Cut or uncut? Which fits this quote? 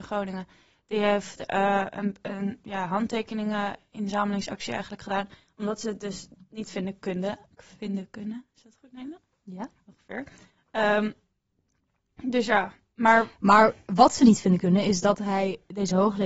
uncut